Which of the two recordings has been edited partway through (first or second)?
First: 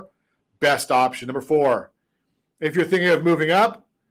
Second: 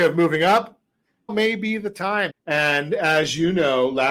second